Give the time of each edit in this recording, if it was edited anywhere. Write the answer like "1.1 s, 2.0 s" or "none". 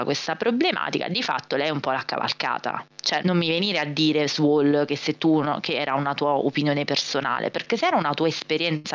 3.2 s